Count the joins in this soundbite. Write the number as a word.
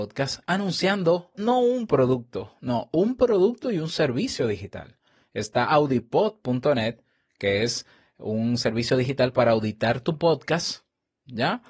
one